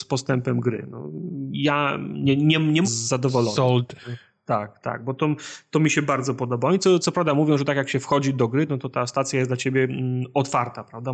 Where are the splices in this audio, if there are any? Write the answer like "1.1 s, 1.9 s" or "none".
2.8 s

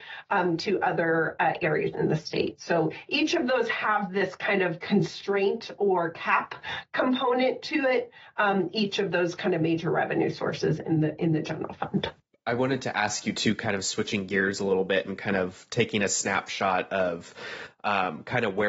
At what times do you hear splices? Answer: none

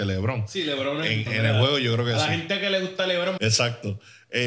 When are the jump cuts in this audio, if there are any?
1.3 s, 3.4 s

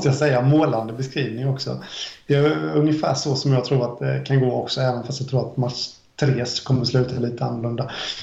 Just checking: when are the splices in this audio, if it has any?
none

